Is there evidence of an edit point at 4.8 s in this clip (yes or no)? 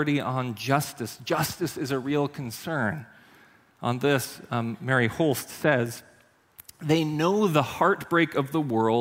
no